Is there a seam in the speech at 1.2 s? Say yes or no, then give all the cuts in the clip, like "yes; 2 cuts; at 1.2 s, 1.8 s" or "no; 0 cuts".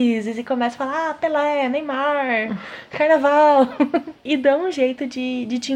no; 1 cut; at 4.3 s